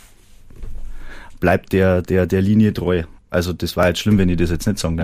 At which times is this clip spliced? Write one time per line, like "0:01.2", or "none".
0:03.2